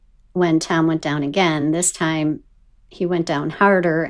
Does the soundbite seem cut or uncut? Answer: uncut